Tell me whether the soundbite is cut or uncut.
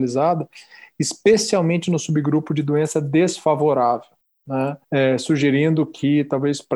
cut